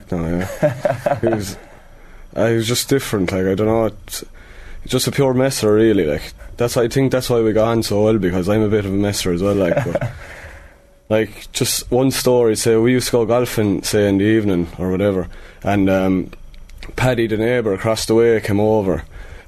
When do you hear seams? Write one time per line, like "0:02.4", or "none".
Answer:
none